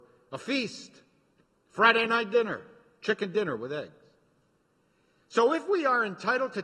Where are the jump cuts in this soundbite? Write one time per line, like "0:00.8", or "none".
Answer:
0:05.2